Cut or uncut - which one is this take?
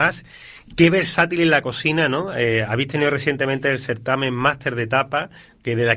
uncut